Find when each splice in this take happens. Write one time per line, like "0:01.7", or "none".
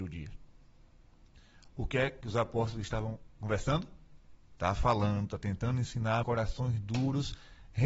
0:04.4
0:06.2

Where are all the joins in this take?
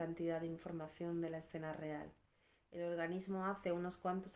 none

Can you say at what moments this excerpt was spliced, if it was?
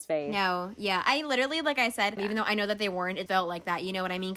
0:02.2
0:03.3

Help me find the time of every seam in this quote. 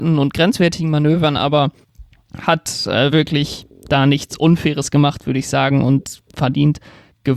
none

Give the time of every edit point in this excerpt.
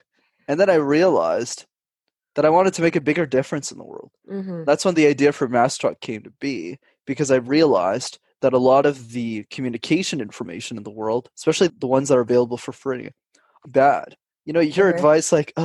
0:11.7
0:13.6

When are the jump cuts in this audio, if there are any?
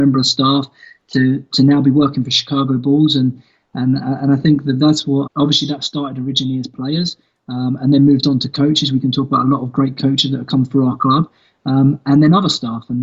0:05.3

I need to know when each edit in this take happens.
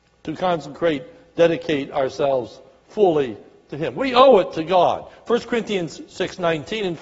none

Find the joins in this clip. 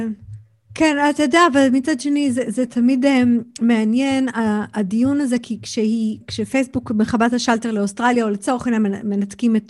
0:06.2

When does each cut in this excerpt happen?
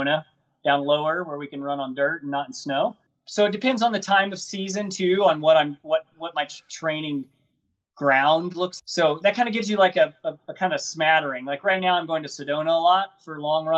0:08.8

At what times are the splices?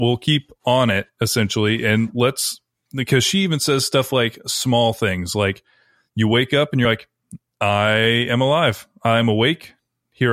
none

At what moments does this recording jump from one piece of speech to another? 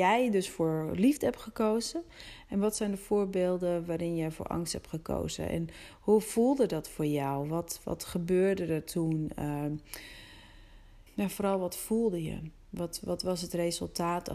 0:11.1
0:13.0

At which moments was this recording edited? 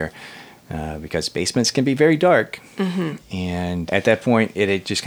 0:03.9

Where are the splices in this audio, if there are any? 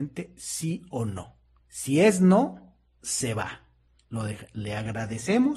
none

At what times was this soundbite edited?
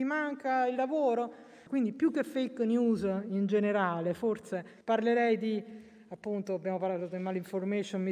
0:01.7
0:04.8

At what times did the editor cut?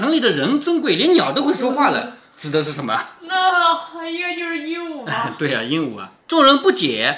0:06.2

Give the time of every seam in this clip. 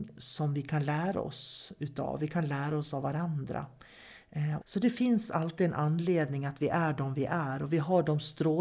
0:04.6

